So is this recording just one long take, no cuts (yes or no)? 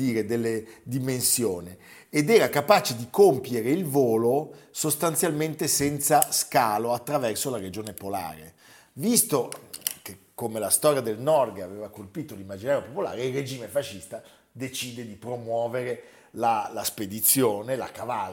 yes